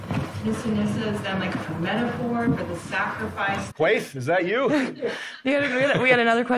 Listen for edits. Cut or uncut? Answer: cut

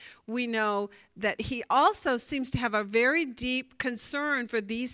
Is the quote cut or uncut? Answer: cut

